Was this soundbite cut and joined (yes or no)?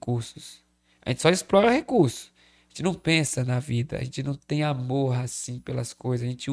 no